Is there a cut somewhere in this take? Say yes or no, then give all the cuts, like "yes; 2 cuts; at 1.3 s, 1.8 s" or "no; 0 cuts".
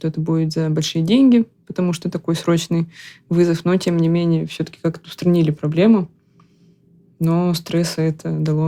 no; 0 cuts